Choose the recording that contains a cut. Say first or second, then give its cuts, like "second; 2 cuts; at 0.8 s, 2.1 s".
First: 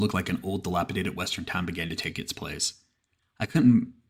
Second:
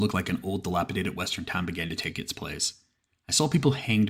first; 1 cut; at 3.2 s